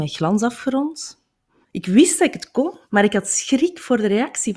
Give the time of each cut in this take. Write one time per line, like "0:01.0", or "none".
0:01.6
0:02.9